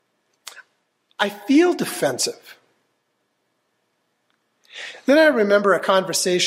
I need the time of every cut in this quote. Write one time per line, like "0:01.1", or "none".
none